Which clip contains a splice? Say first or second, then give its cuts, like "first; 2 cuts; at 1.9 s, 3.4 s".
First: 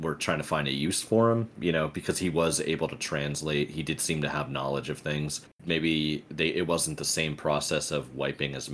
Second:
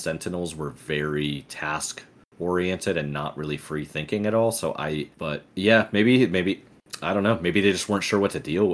first; 1 cut; at 5.5 s